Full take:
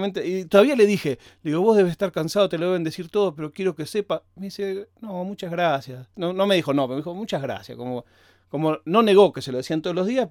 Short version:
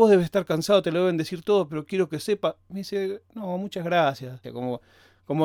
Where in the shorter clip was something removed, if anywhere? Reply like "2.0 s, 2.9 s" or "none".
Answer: 4.4 s